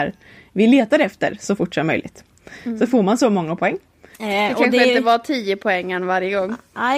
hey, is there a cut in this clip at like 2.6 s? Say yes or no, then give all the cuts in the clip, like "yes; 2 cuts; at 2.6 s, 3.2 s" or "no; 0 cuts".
no; 1 cut; at 4.1 s